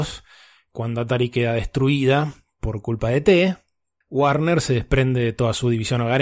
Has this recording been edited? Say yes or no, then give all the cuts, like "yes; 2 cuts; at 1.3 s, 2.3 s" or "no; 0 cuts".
yes; 1 cut; at 4.0 s